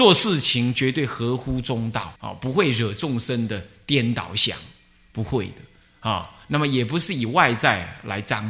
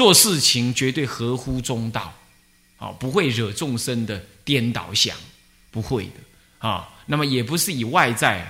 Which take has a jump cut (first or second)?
first